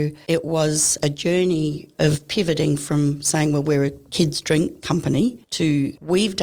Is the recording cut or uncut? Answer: uncut